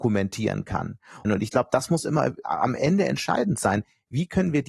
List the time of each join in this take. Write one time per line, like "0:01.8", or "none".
0:01.2